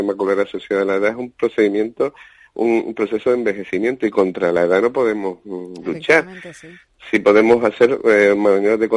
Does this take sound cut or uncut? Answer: uncut